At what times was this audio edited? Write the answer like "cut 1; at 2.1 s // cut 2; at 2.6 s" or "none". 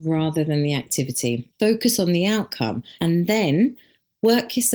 cut 1; at 1.6 s // cut 2; at 3.0 s

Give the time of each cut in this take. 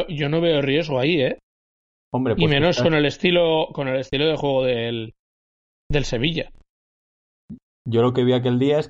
none

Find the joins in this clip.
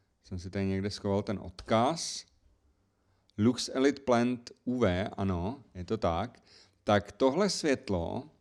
none

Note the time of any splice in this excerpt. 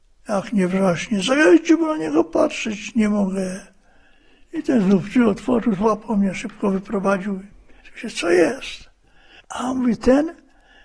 cut 1; at 9.4 s

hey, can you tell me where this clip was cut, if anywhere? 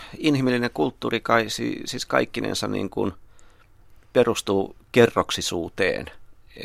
none

